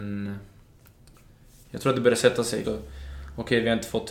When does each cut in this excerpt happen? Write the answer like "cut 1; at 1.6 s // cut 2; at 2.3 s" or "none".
cut 1; at 2.6 s